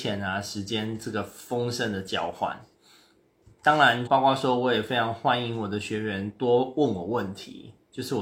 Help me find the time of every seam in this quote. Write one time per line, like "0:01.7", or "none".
0:04.1